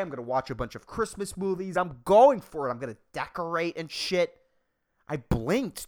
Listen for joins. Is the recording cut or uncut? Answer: cut